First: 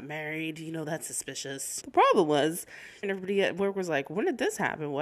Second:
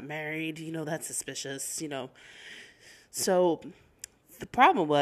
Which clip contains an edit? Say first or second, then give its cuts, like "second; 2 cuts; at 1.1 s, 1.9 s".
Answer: first; 2 cuts; at 1.8 s, 3.0 s